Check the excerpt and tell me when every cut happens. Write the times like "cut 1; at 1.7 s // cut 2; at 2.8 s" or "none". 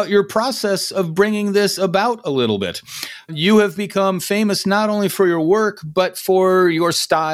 none